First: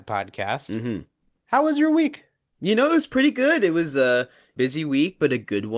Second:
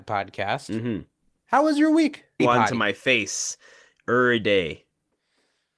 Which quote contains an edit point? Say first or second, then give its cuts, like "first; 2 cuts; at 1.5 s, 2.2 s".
second; 1 cut; at 2.4 s